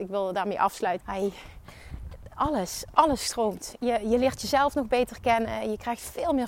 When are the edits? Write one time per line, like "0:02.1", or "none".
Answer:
0:01.0